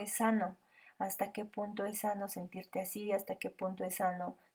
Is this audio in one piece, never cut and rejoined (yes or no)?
yes